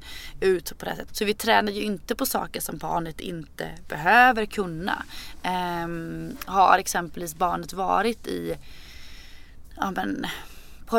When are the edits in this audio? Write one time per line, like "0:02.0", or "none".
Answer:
0:01.1